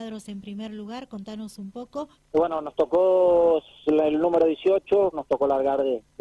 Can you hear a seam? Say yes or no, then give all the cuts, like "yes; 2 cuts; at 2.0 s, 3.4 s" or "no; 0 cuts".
yes; 2 cuts; at 2.1 s, 5.1 s